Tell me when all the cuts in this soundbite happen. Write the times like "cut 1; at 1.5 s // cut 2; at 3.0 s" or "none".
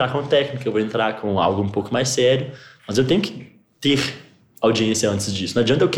none